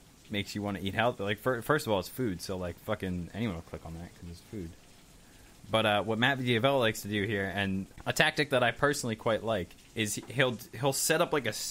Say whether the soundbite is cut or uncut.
cut